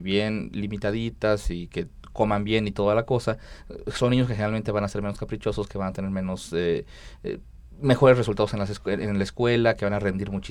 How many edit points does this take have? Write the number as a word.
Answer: zero